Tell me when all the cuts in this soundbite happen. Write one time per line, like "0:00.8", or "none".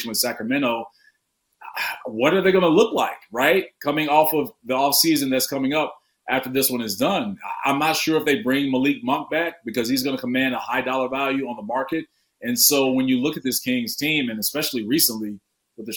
none